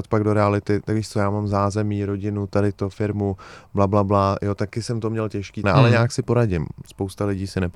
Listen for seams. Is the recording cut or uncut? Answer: cut